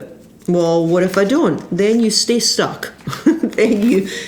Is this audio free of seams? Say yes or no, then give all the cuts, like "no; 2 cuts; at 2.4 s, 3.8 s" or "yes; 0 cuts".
yes; 0 cuts